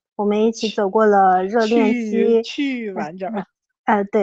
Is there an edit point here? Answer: no; 0 cuts

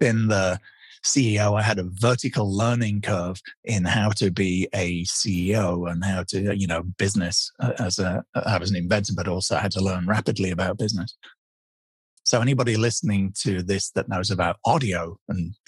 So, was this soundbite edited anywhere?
yes; 1 cut; at 12.2 s

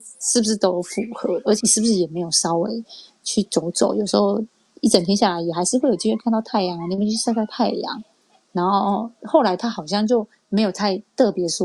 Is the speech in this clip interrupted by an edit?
yes; 1 cut; at 1.6 s

